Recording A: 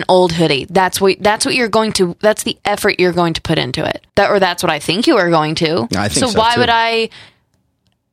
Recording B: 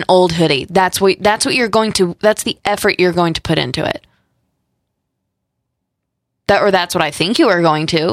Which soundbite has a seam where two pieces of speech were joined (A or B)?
A